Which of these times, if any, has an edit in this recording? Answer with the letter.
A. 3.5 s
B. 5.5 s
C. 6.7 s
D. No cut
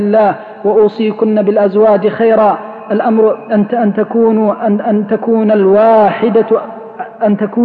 D